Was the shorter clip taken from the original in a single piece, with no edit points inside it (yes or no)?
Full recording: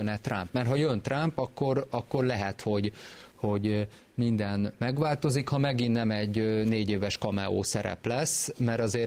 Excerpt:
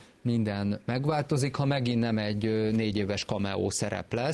yes